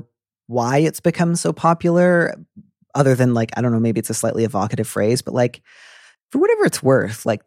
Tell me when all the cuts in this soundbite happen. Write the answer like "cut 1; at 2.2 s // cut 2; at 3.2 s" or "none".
none